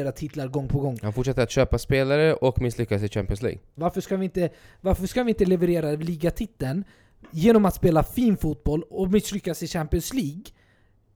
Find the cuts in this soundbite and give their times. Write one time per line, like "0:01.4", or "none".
0:03.8